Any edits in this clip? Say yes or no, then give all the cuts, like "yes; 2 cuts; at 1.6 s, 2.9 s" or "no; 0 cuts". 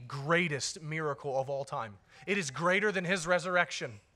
no; 0 cuts